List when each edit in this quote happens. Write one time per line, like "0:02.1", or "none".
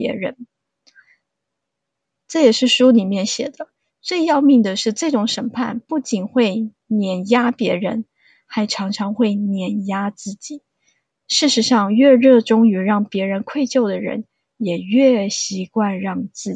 none